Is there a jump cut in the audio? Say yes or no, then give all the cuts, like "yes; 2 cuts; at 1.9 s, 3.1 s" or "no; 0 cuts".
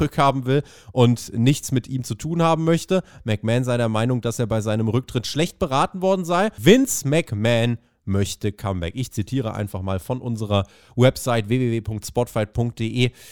yes; 2 cuts; at 3.2 s, 6.6 s